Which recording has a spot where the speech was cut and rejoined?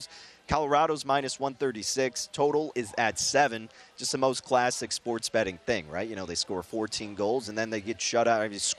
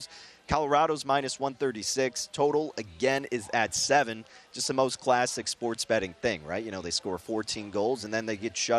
first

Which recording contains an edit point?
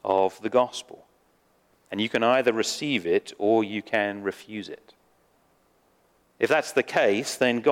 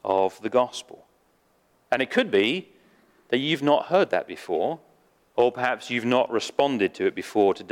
first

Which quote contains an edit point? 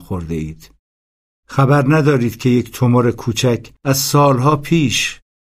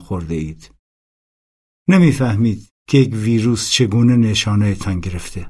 first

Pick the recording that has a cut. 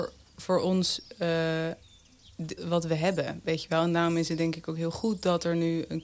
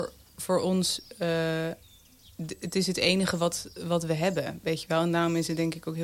first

